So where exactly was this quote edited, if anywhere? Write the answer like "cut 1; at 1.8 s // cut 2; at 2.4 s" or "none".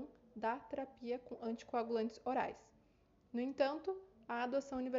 none